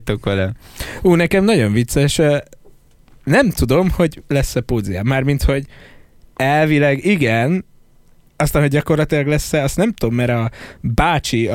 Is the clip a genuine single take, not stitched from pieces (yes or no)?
yes